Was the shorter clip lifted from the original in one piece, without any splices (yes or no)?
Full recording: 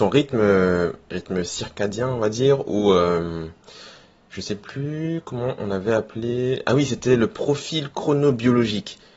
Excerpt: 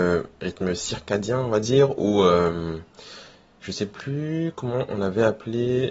yes